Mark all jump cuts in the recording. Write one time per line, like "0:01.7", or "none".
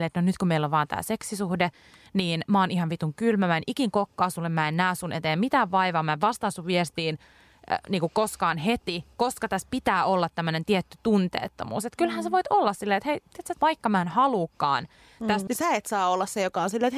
0:13.5
0:15.5